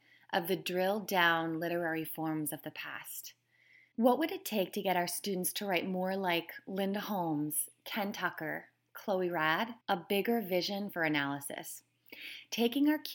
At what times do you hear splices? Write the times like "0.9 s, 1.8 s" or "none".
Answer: 3.9 s, 9.8 s